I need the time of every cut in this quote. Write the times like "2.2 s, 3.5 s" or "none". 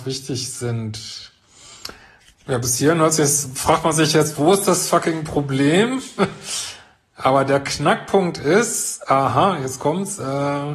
none